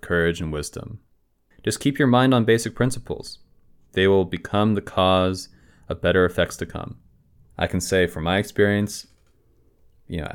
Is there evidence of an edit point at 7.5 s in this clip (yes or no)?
yes